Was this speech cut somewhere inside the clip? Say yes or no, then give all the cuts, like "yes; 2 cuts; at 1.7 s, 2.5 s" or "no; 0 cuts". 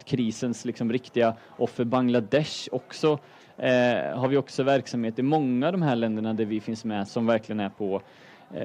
yes; 1 cut; at 7.1 s